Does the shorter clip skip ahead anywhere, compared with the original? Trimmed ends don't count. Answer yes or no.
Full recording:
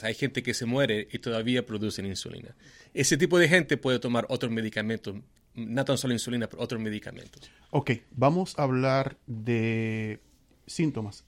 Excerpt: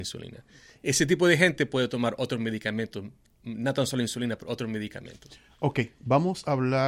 no